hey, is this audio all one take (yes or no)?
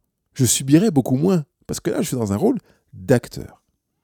yes